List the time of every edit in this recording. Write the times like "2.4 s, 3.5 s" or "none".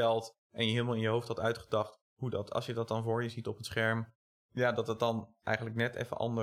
none